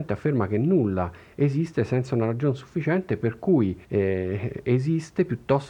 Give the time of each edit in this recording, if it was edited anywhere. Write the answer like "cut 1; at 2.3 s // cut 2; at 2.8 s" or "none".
cut 1; at 3.8 s

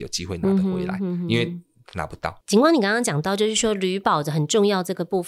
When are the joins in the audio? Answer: cut 1; at 2.4 s

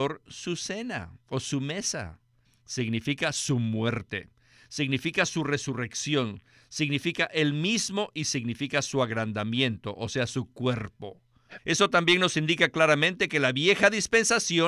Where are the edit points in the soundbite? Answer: cut 1; at 2.4 s // cut 2; at 11.6 s

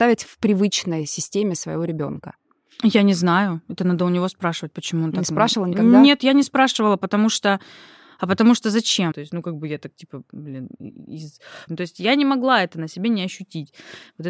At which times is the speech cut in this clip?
cut 1; at 9.1 s // cut 2; at 11.7 s

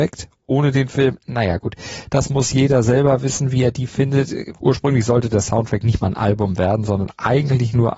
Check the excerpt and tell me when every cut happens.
cut 1; at 4.6 s

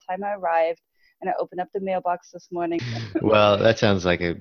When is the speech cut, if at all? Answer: cut 1; at 2.8 s

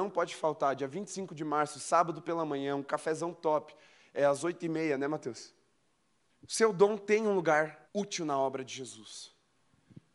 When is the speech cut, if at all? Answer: cut 1; at 6.3 s // cut 2; at 7.8 s

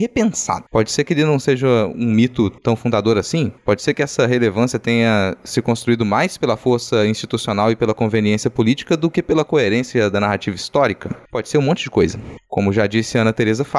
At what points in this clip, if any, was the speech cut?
cut 1; at 2.6 s

